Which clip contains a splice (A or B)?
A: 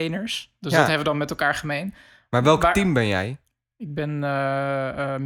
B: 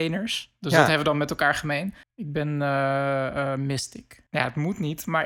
B